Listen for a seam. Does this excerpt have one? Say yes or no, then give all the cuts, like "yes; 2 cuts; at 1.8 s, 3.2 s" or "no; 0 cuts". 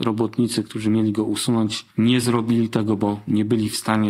yes; 1 cut; at 1.9 s